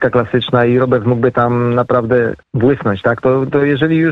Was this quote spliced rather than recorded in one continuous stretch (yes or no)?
yes